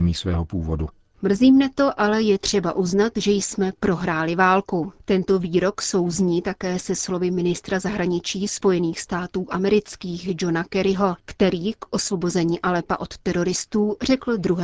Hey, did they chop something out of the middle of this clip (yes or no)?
yes